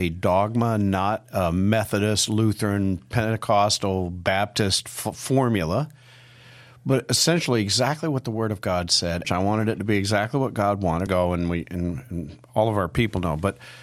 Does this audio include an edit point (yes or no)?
yes